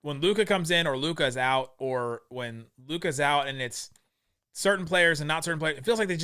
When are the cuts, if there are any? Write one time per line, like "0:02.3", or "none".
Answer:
none